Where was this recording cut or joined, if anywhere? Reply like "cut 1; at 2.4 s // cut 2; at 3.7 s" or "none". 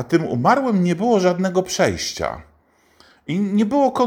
none